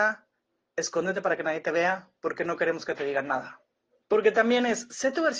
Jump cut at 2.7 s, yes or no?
no